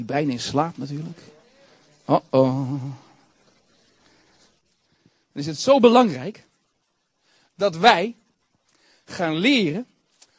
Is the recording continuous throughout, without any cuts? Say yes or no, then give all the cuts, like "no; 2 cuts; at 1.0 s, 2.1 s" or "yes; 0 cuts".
yes; 0 cuts